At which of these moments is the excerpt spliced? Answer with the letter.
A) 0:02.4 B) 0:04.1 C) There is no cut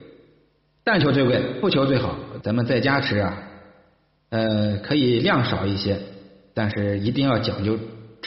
A